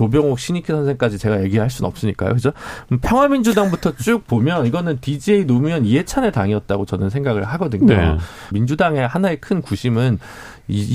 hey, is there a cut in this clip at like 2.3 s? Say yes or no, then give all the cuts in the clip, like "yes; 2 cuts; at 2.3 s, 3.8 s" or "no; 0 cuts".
no; 1 cut; at 8.5 s